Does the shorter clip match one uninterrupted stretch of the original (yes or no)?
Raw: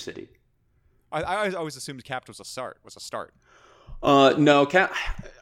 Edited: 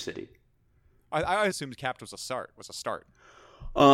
no